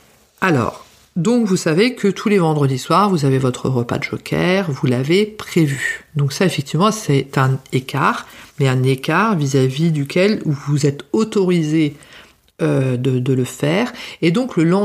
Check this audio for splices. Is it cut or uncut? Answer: uncut